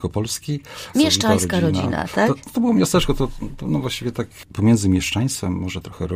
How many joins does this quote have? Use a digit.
1